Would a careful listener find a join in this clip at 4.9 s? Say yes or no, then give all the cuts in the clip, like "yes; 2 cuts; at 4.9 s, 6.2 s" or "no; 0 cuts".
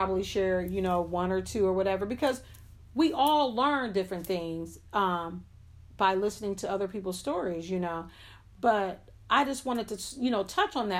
no; 0 cuts